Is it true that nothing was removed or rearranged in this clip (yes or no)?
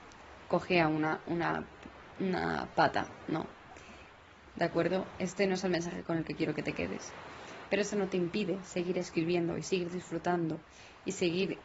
no